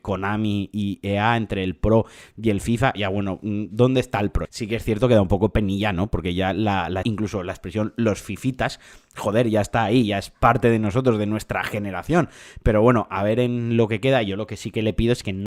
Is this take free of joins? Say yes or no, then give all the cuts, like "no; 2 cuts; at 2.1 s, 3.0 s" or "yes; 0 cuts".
no; 3 cuts; at 2.9 s, 4.4 s, 7.0 s